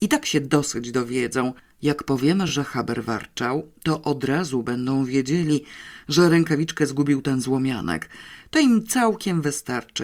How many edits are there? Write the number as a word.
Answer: zero